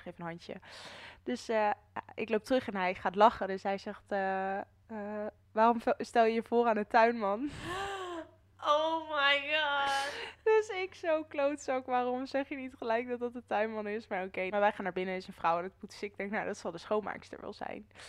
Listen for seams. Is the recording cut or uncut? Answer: cut